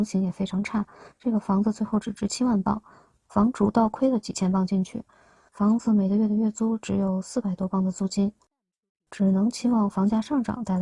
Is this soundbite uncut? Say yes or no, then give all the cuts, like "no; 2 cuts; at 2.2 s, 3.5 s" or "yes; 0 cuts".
yes; 0 cuts